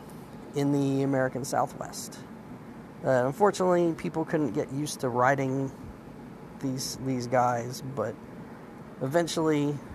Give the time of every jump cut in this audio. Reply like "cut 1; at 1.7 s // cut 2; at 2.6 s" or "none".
none